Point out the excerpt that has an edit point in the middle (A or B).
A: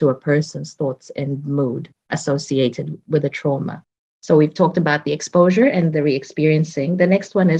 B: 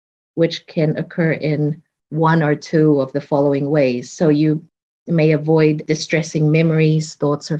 A